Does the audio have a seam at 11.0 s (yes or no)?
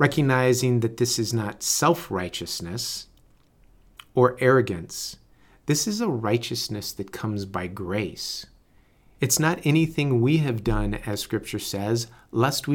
no